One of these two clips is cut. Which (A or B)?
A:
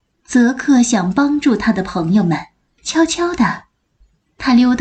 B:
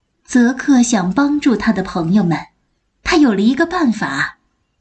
A